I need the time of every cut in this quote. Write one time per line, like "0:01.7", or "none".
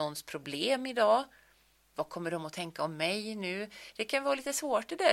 0:01.9